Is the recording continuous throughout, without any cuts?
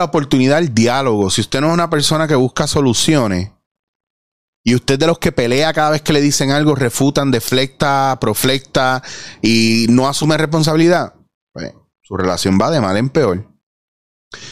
yes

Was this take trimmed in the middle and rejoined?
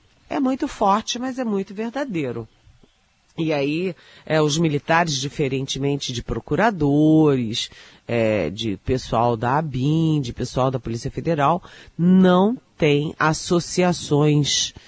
no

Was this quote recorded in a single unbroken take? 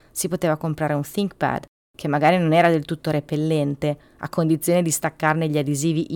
yes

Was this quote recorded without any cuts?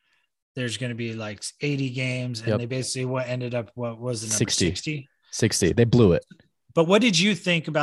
yes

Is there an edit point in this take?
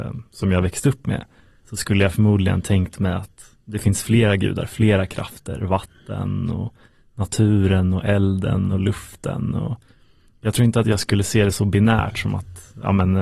no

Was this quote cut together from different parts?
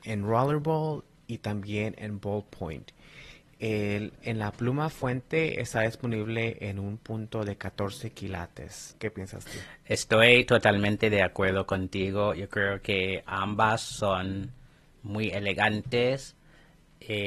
yes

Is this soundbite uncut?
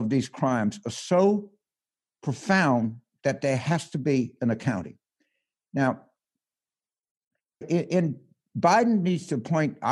no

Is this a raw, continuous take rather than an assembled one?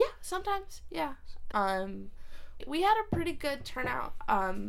no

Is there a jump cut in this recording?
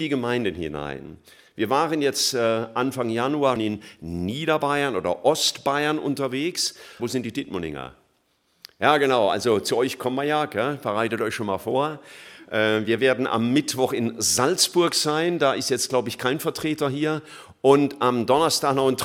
yes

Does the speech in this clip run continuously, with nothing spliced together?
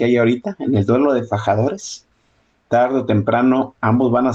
yes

